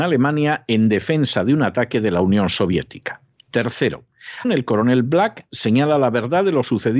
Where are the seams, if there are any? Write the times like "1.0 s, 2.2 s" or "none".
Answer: 4.4 s